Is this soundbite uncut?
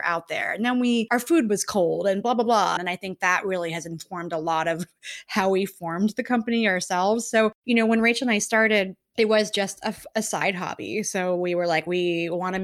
no; 1 cut; at 2.8 s

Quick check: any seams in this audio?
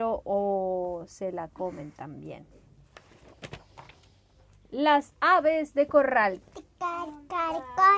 yes; 1 cut; at 6.4 s

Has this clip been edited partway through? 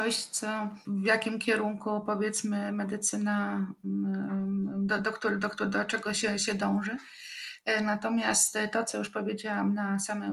no; 0 cuts

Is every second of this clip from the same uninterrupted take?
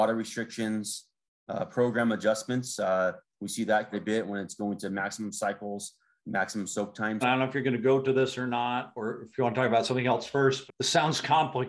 no; 3 cuts; at 3.9 s, 7.2 s, 10.7 s

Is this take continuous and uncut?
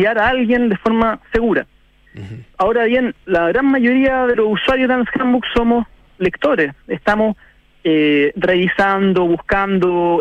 yes; 0 cuts

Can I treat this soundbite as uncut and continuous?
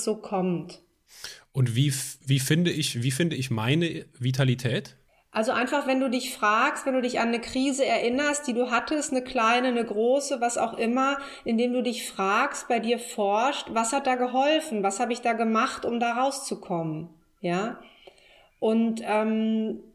yes; 0 cuts

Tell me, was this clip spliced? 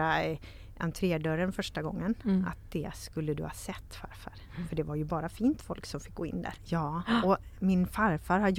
yes; 1 cut; at 6.6 s

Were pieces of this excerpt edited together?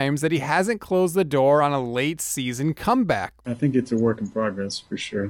yes; 1 cut; at 3.4 s

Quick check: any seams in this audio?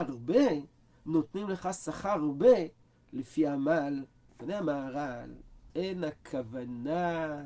yes; 2 cuts; at 4.3 s, 5.7 s

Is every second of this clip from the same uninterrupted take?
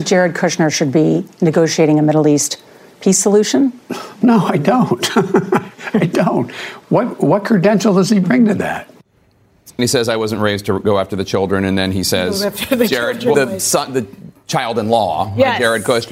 no; 2 cuts; at 9.8 s, 13.3 s

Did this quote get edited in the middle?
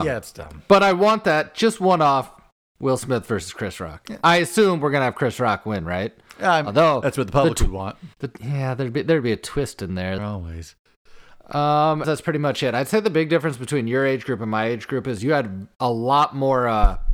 yes; 3 cuts; at 8.1 s, 10.2 s, 12.0 s

